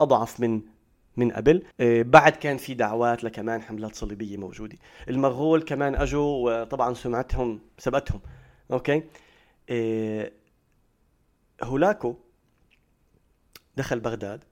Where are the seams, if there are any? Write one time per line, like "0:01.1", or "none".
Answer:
0:01.7